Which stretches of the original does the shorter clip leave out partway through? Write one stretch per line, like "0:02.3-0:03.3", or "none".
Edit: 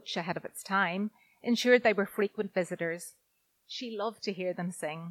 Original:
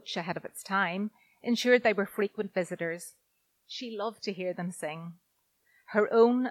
none